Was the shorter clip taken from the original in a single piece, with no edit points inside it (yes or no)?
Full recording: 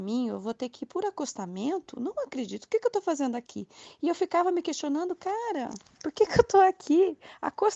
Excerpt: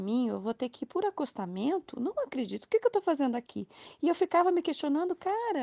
yes